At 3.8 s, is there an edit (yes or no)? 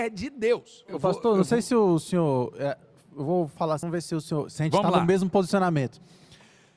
yes